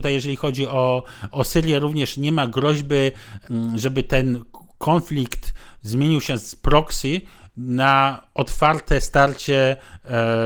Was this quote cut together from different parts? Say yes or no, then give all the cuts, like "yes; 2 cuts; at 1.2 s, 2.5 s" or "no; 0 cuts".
no; 0 cuts